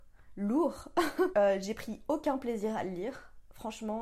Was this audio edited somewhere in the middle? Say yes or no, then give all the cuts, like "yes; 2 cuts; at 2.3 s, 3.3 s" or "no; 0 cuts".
yes; 1 cut; at 1.3 s